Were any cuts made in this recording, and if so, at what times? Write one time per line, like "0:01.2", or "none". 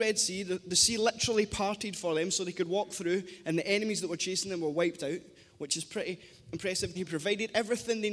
0:06.9